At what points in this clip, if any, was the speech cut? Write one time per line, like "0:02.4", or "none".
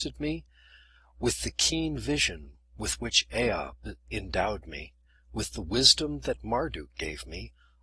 none